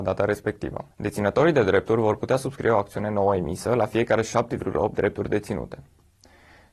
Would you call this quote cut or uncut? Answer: cut